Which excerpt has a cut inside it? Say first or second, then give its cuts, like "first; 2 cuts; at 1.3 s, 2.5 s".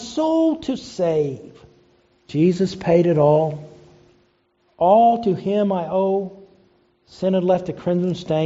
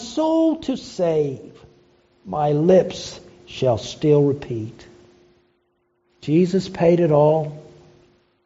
first; 1 cut; at 2.2 s